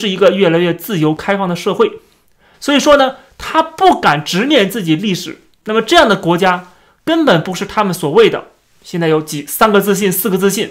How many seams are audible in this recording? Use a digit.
1